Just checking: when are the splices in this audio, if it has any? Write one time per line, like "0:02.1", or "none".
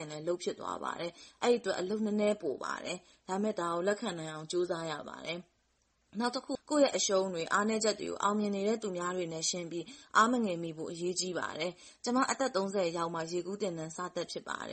0:06.6